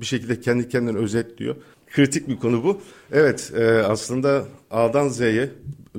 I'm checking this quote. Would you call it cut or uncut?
cut